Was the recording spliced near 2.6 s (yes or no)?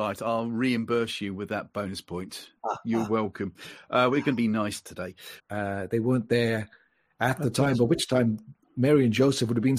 yes